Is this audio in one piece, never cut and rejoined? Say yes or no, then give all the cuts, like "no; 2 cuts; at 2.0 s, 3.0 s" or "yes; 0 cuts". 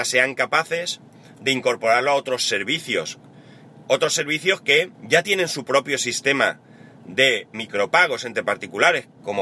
no; 2 cuts; at 4.9 s, 7.5 s